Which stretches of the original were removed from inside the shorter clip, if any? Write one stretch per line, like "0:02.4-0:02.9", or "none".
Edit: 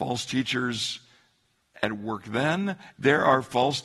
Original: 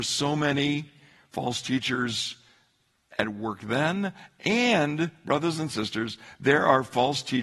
0:04.3-0:06.4